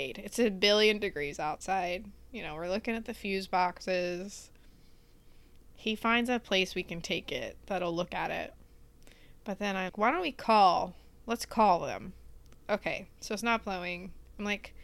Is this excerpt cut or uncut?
cut